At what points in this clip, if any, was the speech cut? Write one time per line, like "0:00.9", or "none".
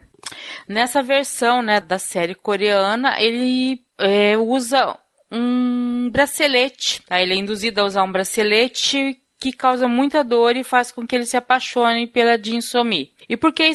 0:01.8